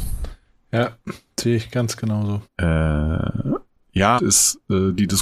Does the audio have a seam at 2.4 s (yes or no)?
yes